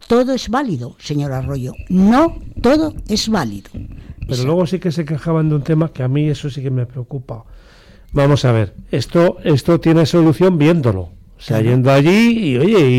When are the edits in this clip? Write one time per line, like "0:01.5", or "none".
0:04.3